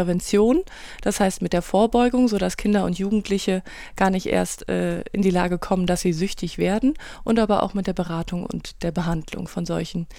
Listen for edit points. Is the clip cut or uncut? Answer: uncut